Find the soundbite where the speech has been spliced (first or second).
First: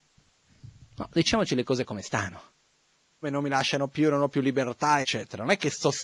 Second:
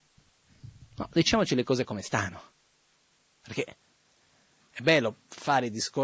first